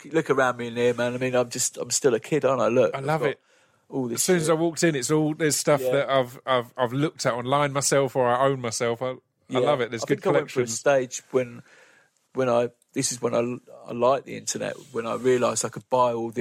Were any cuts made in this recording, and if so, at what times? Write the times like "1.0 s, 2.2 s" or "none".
none